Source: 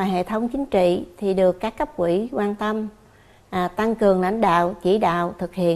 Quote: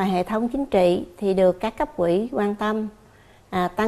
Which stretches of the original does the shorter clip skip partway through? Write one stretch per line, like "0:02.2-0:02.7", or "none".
none